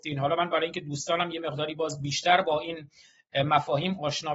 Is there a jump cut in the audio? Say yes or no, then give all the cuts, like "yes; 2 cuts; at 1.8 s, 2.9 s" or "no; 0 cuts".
no; 0 cuts